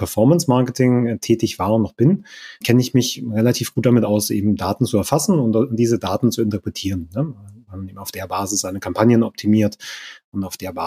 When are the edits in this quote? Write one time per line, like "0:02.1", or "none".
0:02.6